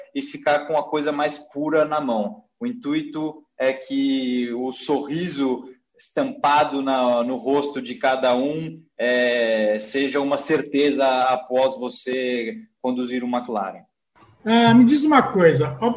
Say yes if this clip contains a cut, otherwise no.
yes